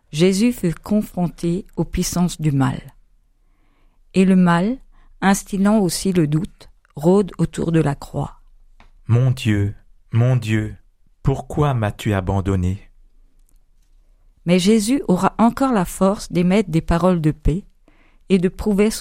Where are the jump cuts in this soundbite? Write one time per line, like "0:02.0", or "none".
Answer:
0:09.0